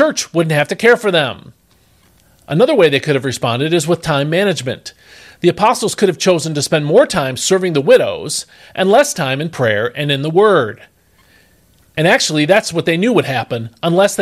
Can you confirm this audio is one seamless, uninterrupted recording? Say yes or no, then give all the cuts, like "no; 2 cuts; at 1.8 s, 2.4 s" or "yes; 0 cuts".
yes; 0 cuts